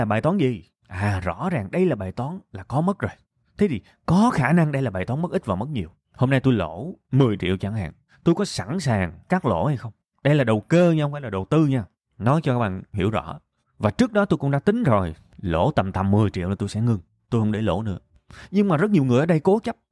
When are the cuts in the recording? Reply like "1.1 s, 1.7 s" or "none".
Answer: none